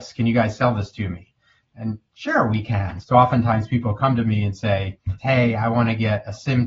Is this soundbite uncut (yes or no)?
no